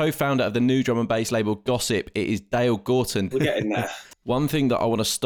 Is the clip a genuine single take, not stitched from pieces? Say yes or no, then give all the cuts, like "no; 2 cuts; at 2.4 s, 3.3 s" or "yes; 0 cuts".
no; 1 cut; at 3.3 s